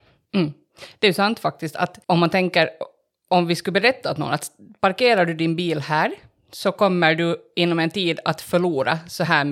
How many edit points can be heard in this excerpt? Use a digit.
1